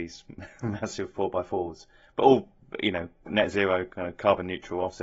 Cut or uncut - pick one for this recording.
uncut